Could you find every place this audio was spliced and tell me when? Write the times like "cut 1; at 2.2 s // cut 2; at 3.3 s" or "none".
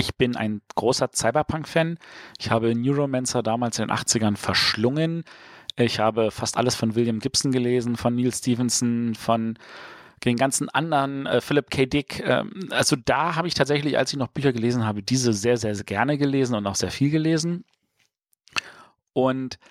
none